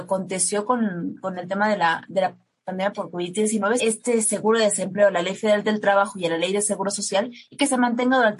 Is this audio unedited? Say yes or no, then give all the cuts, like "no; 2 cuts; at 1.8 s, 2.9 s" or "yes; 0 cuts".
no; 1 cut; at 3.8 s